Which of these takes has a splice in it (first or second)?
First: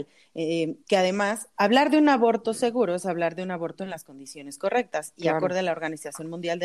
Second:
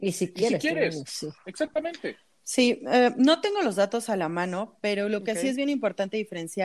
first